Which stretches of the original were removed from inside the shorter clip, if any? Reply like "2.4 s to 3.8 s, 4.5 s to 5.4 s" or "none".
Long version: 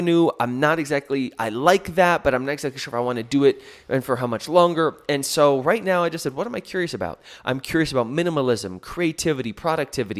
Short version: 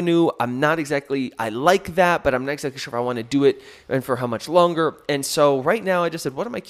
none